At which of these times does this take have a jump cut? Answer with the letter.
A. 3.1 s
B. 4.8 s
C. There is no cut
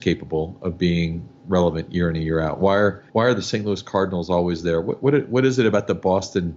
A